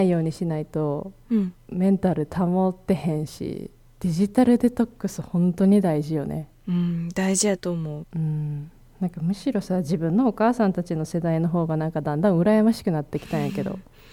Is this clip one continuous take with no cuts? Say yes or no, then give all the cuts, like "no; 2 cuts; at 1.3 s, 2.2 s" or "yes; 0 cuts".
no; 1 cut; at 8.0 s